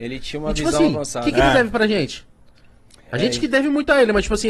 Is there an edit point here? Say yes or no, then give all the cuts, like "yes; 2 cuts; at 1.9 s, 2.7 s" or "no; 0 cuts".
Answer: no; 0 cuts